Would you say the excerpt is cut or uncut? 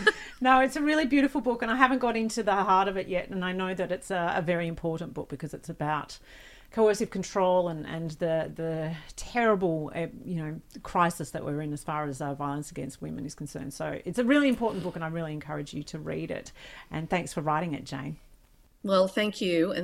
uncut